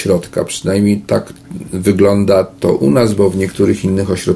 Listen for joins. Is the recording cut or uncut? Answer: uncut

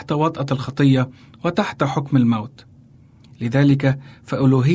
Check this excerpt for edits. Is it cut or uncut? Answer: uncut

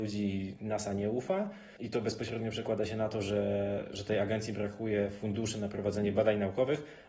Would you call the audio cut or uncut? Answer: uncut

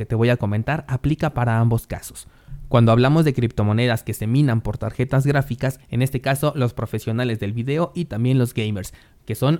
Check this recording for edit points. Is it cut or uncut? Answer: cut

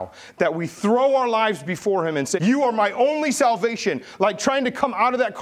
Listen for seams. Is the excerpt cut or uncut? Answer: cut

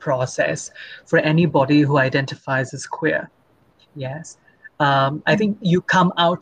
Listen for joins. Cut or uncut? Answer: uncut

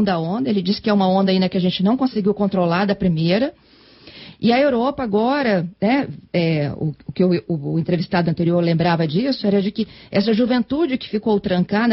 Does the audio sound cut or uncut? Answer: cut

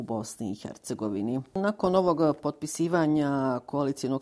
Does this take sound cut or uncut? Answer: uncut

